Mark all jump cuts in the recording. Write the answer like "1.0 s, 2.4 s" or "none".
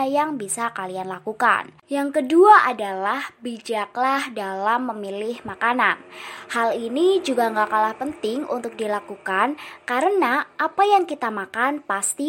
1.8 s